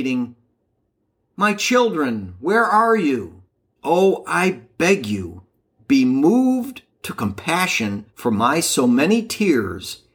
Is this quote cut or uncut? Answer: cut